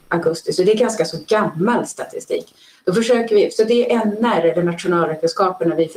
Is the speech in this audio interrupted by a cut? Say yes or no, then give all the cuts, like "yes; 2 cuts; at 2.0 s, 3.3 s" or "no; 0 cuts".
no; 0 cuts